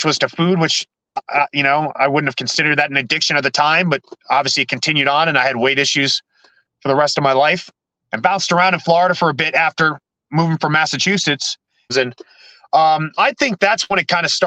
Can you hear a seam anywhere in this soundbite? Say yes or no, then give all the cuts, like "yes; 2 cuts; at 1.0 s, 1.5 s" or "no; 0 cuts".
yes; 3 cuts; at 8.0 s, 11.9 s, 13.2 s